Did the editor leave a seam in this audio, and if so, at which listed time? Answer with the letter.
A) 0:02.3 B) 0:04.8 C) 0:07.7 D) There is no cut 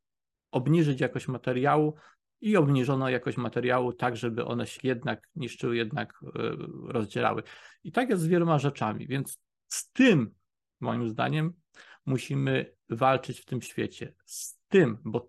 B